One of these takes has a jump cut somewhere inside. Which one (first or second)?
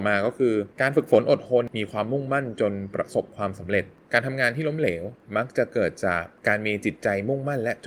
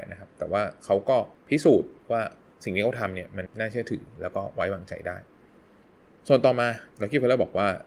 second